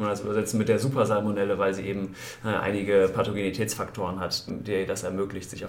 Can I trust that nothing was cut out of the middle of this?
no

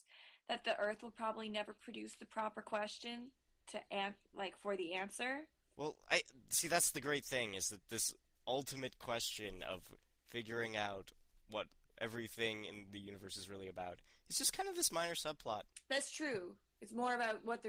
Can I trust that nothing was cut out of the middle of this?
no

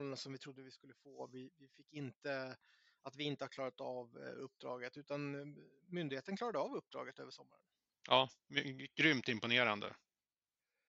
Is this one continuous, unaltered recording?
yes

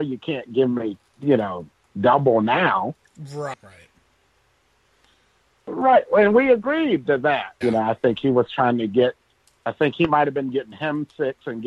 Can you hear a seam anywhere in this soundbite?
yes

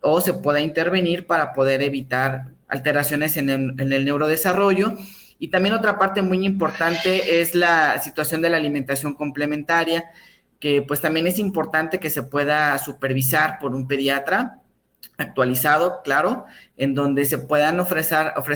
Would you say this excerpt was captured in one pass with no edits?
no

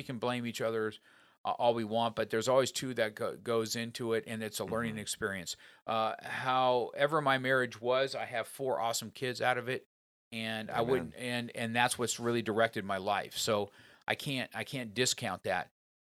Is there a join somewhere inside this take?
no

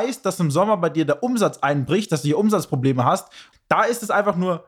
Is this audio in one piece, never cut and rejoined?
no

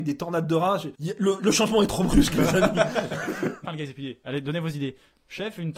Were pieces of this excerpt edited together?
yes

